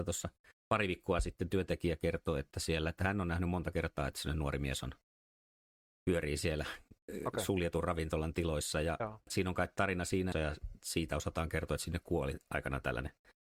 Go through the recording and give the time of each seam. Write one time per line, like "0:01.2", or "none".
0:09.3
0:10.3